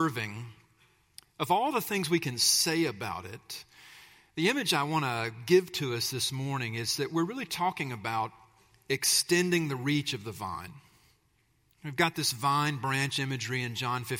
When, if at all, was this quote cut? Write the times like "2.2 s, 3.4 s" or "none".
none